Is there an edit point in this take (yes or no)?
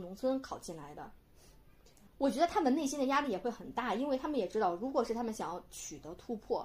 no